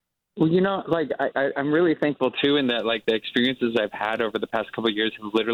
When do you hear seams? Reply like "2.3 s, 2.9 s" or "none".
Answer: 1.3 s